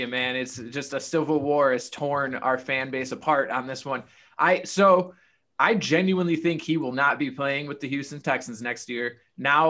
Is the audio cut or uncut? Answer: uncut